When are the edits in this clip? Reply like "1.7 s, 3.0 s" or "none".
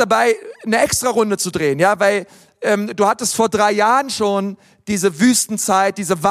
none